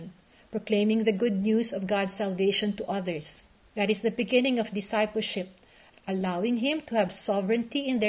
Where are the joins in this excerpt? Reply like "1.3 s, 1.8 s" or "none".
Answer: 3.7 s, 5.9 s

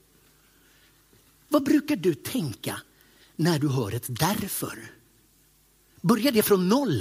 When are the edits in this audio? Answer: 1.5 s

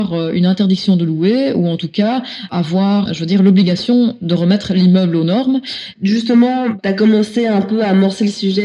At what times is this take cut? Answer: 3.1 s, 5.9 s

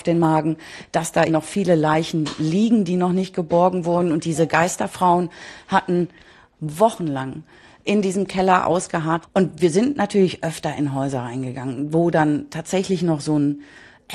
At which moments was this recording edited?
1.3 s, 9.2 s

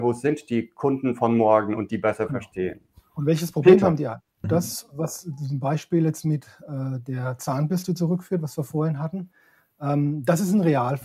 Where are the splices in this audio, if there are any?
4.4 s

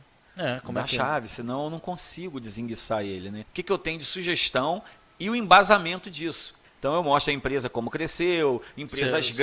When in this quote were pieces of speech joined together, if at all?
3.4 s, 6.6 s

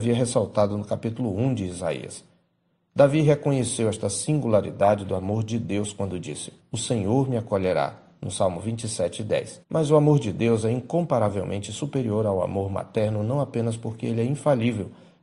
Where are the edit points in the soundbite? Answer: 6.6 s, 9.6 s

